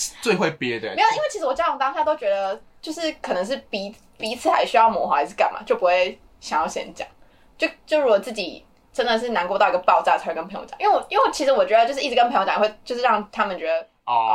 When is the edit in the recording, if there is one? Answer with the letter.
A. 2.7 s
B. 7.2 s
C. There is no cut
C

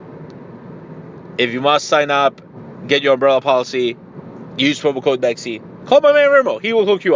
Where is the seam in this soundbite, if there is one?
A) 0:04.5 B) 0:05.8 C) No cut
A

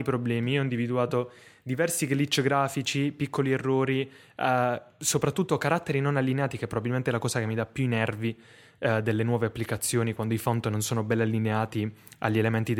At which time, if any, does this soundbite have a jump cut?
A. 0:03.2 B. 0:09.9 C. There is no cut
C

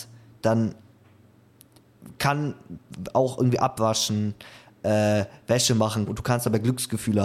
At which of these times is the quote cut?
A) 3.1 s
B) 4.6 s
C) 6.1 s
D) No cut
C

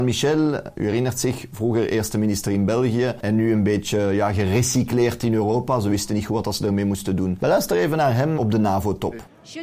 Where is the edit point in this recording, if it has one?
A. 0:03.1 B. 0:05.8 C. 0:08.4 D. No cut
C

